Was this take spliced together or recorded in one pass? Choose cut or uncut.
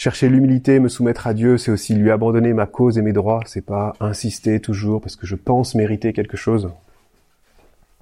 uncut